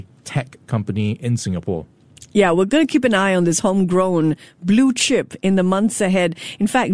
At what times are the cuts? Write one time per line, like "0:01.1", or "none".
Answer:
none